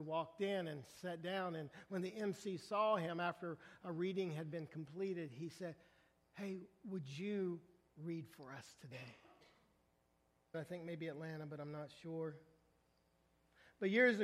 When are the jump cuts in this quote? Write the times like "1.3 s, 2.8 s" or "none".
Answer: 10.5 s